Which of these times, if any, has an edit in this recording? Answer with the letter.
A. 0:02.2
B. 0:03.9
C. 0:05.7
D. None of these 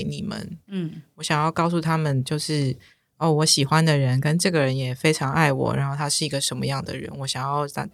D